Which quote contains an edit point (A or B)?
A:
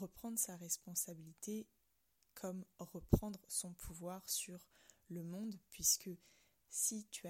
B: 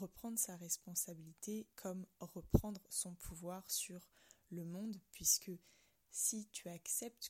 B